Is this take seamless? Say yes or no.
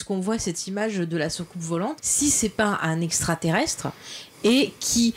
no